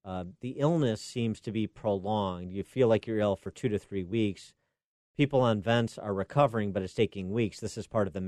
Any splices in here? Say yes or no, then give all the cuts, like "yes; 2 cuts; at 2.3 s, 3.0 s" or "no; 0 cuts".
no; 0 cuts